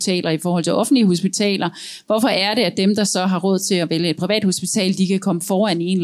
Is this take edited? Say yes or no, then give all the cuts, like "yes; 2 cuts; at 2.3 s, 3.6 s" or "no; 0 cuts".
no; 0 cuts